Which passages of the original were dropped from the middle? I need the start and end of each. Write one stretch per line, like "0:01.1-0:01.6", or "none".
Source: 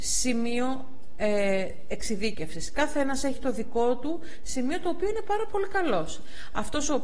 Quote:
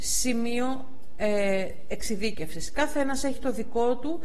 none